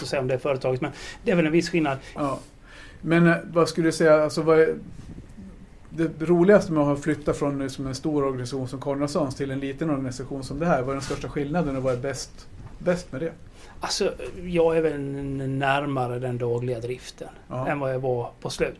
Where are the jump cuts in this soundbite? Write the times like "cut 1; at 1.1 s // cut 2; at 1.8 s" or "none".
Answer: cut 1; at 2.2 s

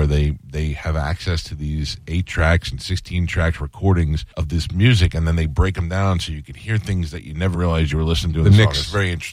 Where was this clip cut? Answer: cut 1; at 4.3 s // cut 2; at 7.5 s

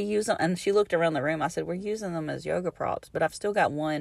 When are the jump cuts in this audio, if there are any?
none

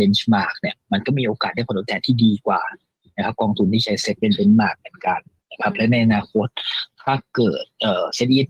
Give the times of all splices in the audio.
none

